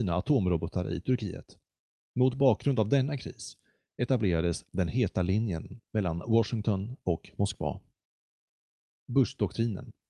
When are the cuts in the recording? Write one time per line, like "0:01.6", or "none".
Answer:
none

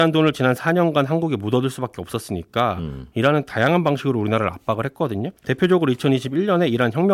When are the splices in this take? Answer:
0:05.4

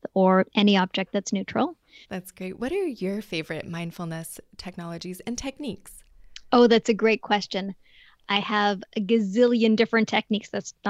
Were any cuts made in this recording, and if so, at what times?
0:02.0

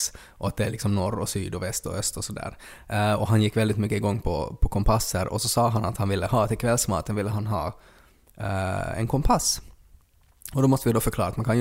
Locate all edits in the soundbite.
none

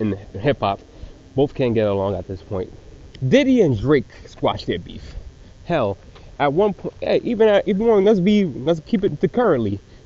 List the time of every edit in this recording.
0:03.2
0:07.6

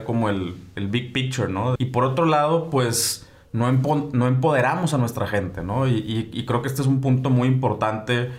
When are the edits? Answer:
0:01.8

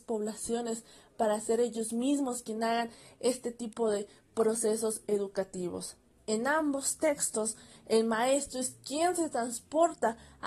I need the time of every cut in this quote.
none

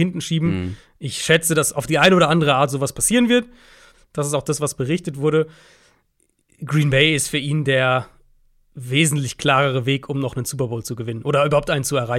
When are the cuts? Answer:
0:03.9

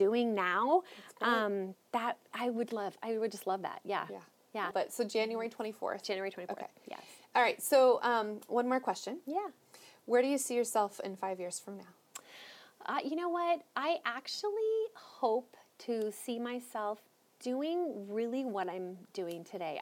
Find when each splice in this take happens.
0:04.7

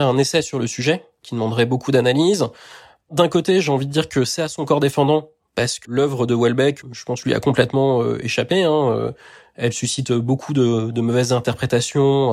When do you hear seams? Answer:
0:05.8

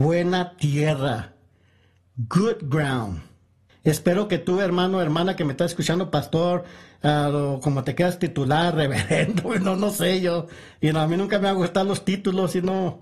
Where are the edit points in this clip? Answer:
0:03.7

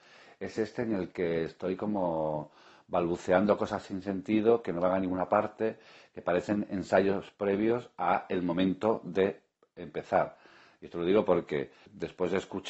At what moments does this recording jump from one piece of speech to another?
none

